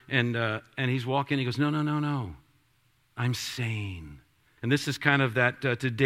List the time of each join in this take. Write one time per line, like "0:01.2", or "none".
0:04.6